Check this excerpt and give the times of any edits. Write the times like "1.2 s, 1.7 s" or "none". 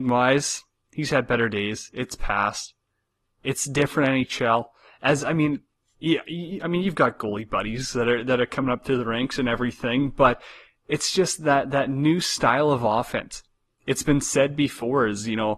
none